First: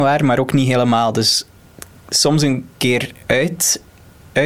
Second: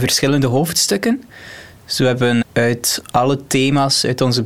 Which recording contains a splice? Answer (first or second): second